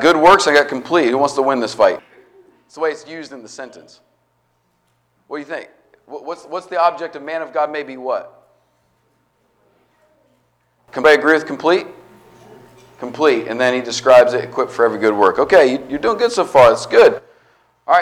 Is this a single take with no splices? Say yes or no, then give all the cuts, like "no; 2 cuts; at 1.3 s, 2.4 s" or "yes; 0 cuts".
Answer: no; 1 cut; at 2.0 s